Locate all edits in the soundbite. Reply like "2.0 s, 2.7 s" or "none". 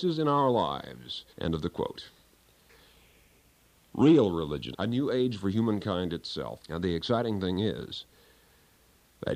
1.3 s, 4.7 s, 6.6 s